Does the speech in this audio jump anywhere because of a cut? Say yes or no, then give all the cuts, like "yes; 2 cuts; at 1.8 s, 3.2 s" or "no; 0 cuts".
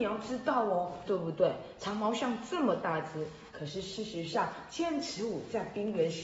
yes; 1 cut; at 1.1 s